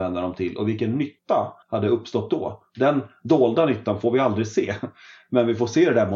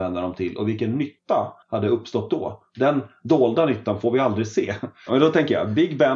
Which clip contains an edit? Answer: second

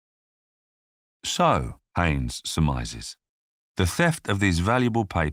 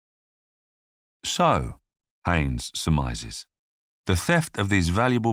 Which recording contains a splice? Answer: first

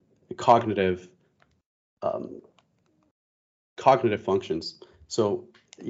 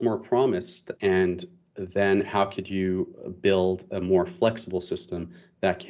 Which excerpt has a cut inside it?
second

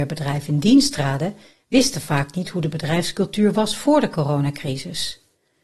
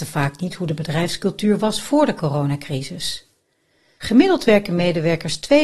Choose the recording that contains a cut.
second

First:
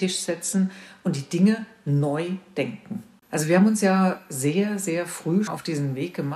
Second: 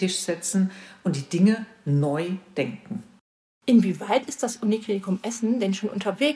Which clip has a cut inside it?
first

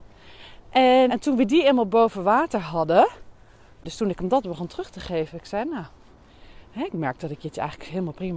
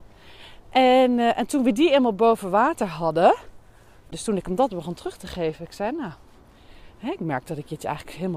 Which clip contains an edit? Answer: first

